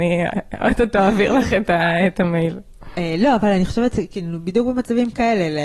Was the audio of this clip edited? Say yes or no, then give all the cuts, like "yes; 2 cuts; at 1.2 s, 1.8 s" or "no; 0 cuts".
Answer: no; 0 cuts